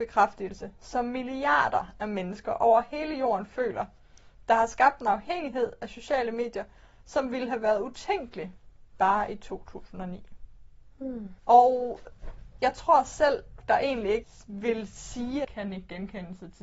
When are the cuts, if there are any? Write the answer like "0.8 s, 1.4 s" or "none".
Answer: 13.6 s, 15.4 s